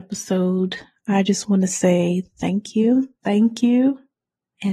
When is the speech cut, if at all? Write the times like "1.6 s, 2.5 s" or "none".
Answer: 3.2 s